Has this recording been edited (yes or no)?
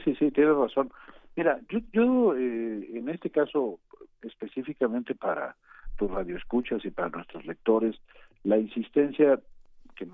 no